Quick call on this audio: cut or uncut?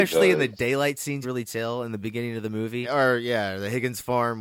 cut